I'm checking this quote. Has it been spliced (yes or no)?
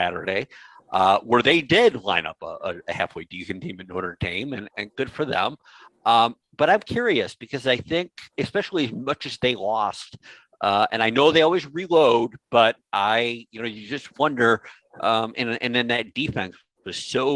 no